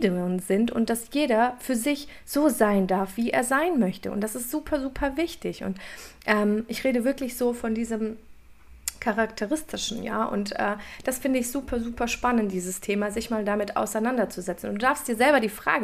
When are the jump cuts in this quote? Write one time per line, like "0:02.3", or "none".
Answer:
none